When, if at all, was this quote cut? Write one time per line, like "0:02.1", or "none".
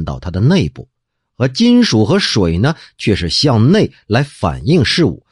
none